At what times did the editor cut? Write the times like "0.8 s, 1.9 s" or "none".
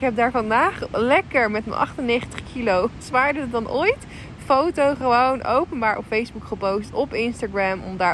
none

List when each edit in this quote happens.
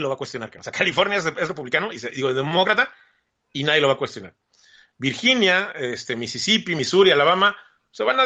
none

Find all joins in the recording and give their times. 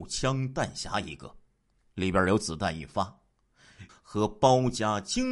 3.9 s

